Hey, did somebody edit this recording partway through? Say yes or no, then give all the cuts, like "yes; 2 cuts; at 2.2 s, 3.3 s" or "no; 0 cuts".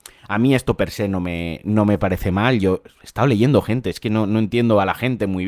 no; 0 cuts